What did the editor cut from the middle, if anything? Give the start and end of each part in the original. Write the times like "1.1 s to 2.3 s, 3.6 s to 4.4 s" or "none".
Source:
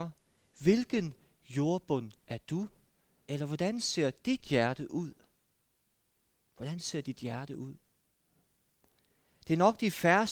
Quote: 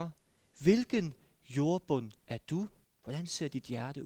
2.8 s to 6.4 s